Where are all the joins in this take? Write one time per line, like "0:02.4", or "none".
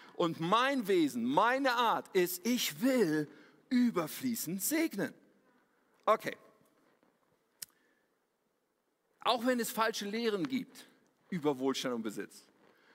none